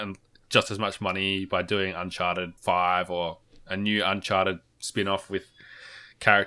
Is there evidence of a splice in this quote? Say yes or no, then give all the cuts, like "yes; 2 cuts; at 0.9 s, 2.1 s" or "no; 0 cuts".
yes; 1 cut; at 2.6 s